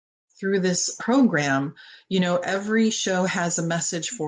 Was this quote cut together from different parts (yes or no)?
yes